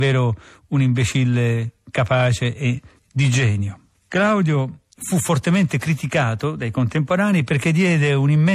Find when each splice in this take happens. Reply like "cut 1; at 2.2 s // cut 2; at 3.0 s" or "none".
none